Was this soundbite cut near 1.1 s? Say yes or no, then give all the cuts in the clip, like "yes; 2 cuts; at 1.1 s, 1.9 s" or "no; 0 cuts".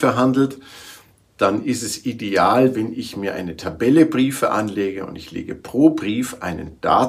no; 0 cuts